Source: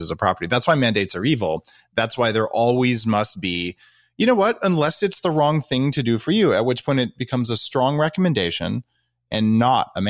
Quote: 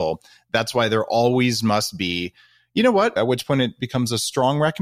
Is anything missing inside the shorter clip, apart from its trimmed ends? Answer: yes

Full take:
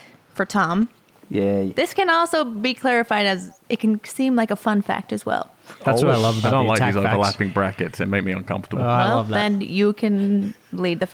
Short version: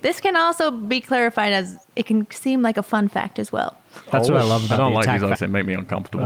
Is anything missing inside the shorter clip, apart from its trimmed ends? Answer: yes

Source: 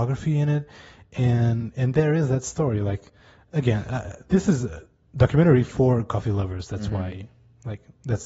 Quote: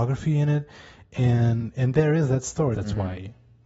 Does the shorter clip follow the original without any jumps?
no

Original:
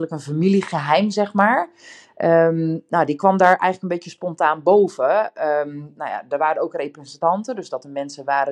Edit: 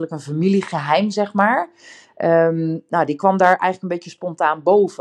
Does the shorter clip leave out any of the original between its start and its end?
no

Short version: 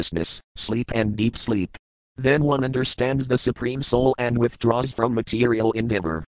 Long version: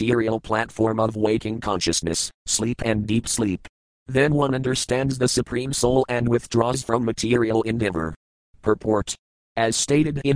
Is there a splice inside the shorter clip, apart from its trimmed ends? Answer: no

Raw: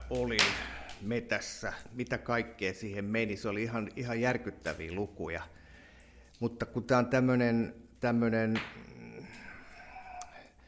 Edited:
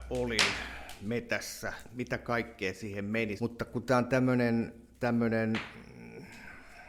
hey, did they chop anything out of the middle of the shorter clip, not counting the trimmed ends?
yes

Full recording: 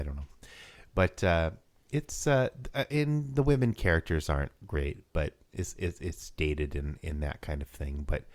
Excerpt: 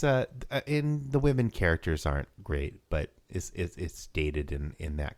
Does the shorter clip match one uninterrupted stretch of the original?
yes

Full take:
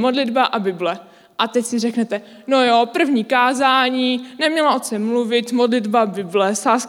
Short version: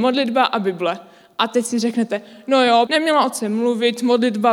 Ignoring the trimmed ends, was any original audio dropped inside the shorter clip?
yes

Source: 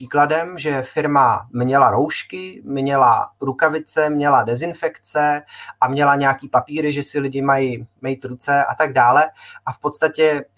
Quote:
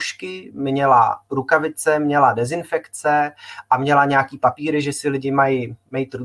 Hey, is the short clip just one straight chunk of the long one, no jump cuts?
yes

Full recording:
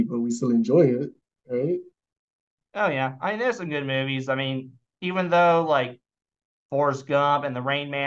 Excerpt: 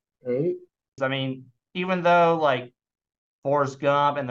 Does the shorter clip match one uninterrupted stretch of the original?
no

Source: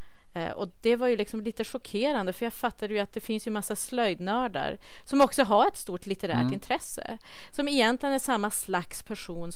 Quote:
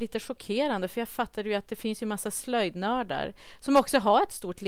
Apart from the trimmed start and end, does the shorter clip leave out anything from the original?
no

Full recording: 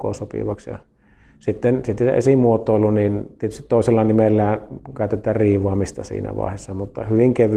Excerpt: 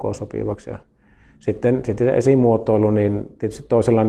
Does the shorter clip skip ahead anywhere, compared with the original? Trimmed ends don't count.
no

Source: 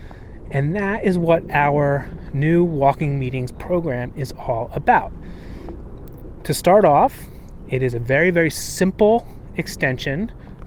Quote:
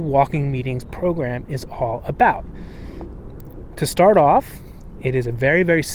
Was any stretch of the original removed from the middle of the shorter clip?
no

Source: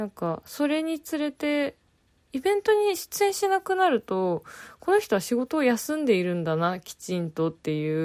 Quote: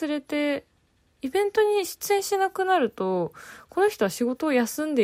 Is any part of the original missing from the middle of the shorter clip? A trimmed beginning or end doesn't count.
no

